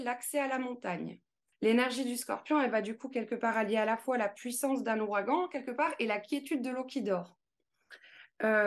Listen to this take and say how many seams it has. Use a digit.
1